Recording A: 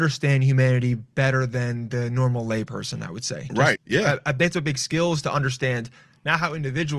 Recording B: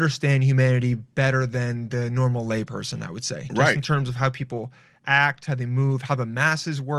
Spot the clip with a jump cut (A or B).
A